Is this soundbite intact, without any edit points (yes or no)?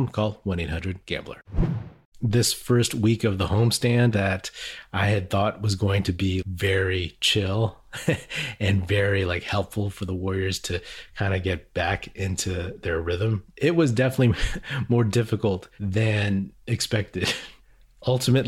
no